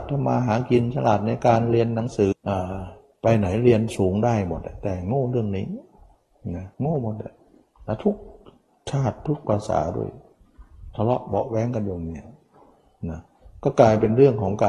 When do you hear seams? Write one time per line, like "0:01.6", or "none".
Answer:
0:02.3
0:06.7